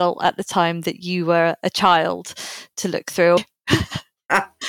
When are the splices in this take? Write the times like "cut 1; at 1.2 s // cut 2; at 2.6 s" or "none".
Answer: cut 1; at 3.4 s